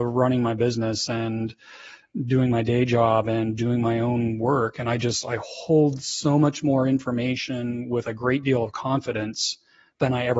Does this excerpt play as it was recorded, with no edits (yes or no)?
yes